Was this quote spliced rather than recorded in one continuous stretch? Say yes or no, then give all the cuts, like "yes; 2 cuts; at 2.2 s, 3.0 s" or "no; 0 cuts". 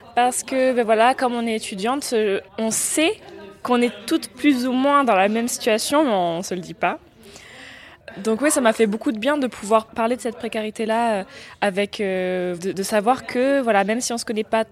yes; 2 cuts; at 2.5 s, 12.6 s